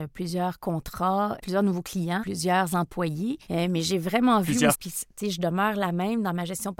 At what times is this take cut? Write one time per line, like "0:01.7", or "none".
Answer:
0:02.2
0:04.7

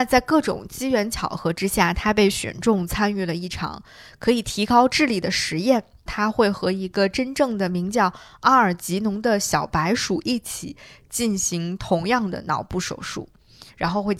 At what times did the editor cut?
0:06.1

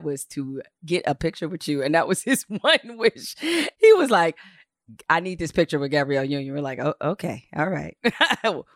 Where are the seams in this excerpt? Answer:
0:03.7

